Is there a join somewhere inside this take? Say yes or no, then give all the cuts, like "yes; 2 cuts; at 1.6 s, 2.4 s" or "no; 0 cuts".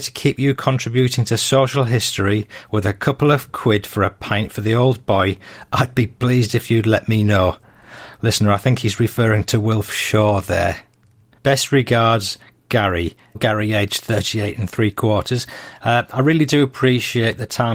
yes; 2 cuts; at 11.4 s, 13.3 s